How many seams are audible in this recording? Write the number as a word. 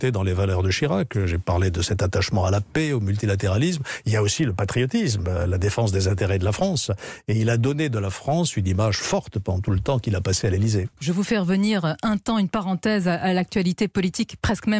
one